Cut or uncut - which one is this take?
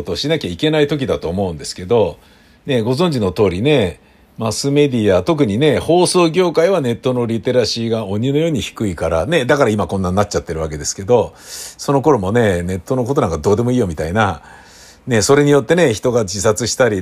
uncut